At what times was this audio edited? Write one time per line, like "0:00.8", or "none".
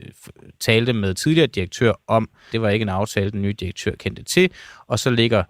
0:02.5